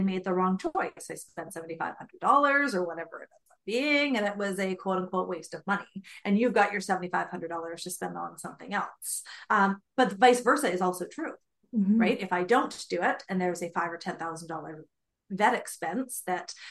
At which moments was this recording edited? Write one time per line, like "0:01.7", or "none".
none